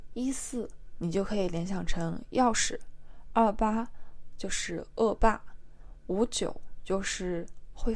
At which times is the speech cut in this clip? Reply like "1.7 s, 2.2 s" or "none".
none

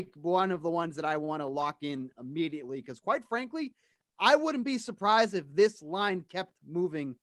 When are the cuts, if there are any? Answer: none

